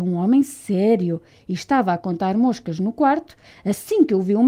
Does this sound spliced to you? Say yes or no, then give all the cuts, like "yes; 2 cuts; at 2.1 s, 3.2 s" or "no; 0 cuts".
no; 0 cuts